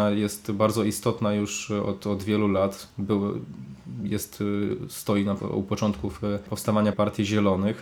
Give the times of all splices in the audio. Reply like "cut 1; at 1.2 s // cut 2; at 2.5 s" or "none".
cut 1; at 5.4 s // cut 2; at 6.9 s